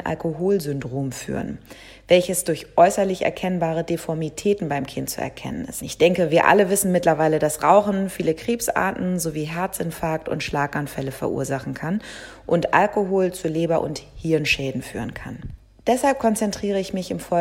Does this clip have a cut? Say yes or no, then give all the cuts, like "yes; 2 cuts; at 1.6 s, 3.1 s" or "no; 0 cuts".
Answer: yes; 1 cut; at 5.8 s